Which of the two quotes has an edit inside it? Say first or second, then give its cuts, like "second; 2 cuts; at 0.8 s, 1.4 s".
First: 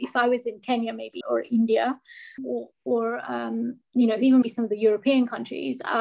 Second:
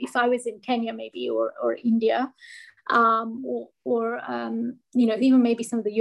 first; 3 cuts; at 1.2 s, 2.4 s, 4.4 s